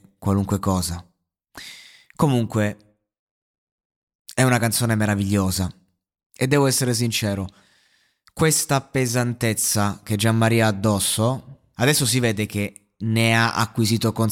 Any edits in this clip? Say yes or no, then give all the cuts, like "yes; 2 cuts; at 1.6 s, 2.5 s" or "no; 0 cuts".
yes; 1 cut; at 11.7 s